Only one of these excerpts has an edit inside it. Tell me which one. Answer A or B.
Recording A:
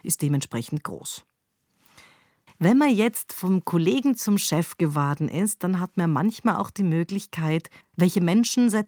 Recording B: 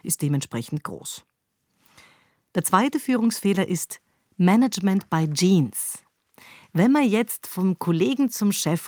A